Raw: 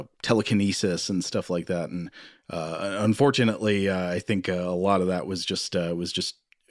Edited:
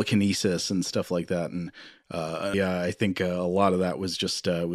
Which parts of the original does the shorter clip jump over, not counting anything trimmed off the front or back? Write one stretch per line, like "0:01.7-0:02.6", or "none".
0:02.9-0:03.8